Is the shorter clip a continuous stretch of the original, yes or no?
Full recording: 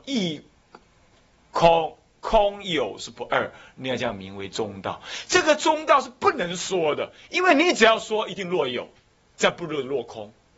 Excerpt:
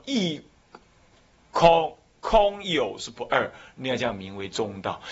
yes